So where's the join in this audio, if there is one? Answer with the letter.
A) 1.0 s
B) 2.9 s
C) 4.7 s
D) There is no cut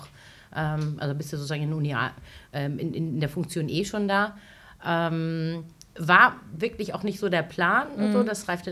D